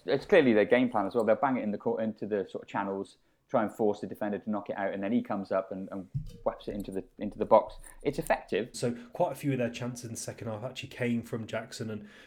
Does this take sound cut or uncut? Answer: cut